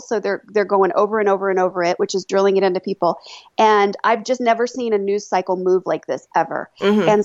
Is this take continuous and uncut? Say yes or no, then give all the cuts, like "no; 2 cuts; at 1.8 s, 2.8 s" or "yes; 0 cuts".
yes; 0 cuts